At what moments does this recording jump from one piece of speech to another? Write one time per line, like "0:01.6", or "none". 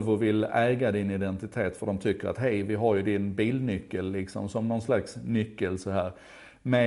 none